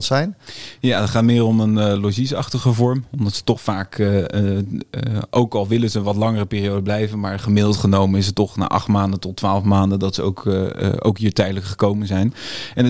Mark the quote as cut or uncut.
uncut